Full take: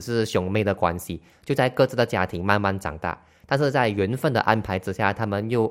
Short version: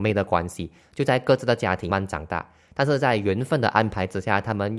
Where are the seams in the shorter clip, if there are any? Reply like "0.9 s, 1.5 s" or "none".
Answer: 1.9 s